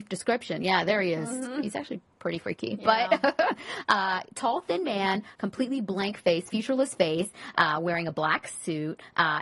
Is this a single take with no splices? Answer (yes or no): yes